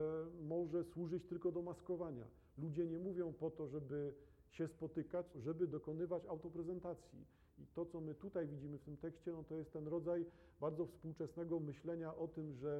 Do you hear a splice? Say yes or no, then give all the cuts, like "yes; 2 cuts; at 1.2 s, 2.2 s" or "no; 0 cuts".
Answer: yes; 1 cut; at 5.3 s